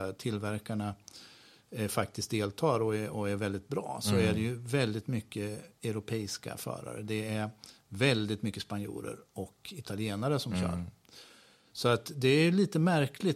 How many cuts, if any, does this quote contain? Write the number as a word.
zero